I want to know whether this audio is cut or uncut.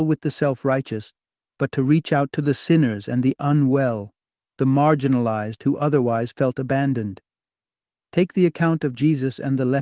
uncut